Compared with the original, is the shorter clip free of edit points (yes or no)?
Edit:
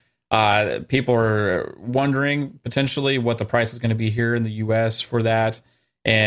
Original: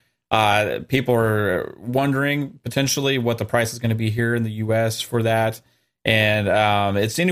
yes